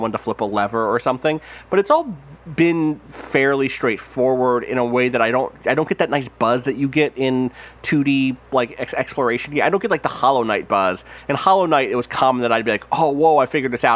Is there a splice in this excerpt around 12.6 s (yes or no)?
no